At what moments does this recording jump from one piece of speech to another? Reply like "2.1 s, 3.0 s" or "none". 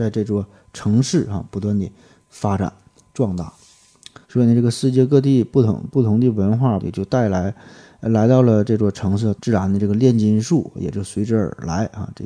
4.2 s, 6.8 s, 9.3 s